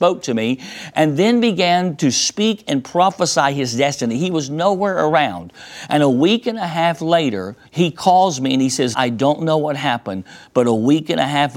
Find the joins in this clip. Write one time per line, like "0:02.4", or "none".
0:07.6
0:08.9